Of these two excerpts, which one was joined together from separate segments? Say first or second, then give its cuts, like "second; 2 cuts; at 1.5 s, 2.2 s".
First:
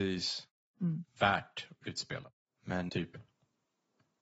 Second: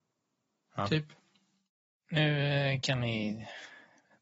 first; 2 cuts; at 1.1 s, 2.9 s